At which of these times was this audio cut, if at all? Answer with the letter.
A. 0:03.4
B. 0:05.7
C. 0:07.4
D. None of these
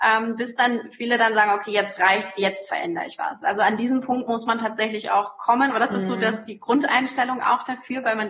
B